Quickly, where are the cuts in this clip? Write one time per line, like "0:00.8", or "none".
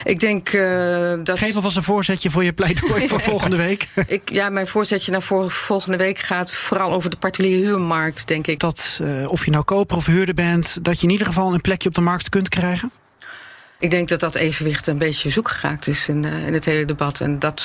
0:04.1
0:08.6
0:13.8